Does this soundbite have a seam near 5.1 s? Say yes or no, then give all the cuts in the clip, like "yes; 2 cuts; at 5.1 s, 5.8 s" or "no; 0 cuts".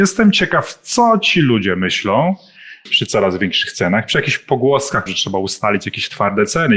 yes; 2 cuts; at 2.9 s, 5.1 s